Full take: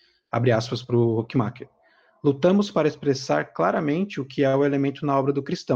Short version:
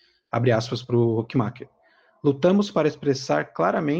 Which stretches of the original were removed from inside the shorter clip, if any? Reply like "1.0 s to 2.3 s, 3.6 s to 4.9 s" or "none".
none